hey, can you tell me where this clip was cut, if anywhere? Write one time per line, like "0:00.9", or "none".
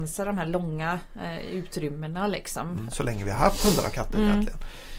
0:02.9

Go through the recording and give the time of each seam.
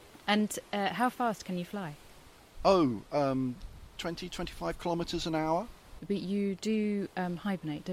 none

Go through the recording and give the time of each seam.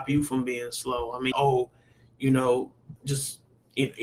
0:01.3
0:03.0

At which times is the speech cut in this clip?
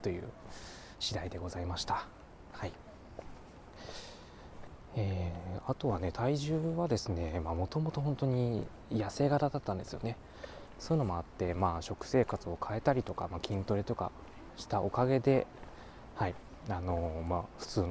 0:10.7

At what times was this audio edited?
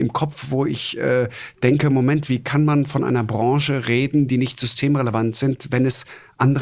none

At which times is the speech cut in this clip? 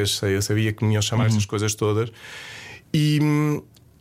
none

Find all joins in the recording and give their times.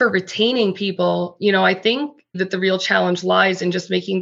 0:02.3

